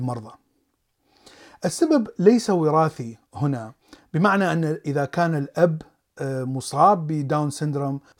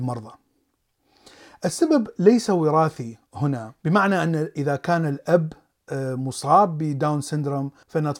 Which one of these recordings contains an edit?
second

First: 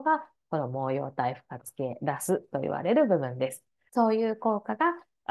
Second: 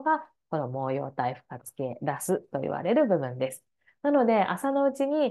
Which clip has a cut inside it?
first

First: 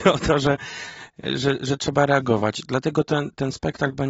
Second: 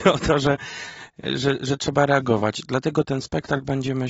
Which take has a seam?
second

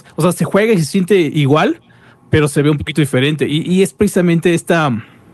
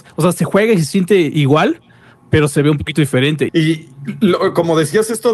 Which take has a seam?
second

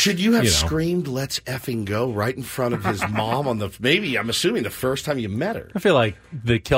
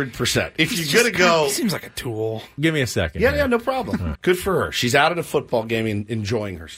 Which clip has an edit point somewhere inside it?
second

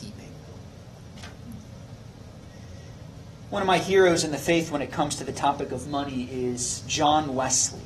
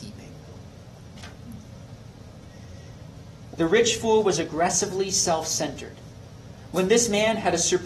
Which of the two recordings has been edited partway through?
second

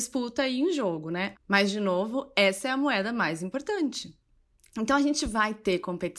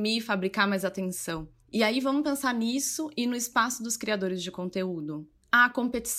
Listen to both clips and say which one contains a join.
first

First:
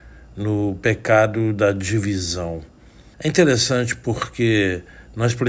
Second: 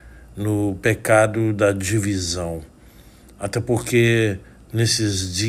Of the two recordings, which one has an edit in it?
first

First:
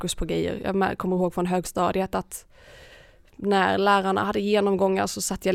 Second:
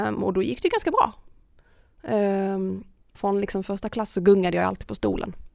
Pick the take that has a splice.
second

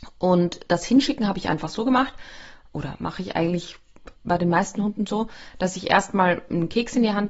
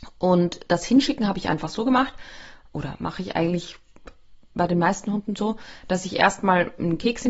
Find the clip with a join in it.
first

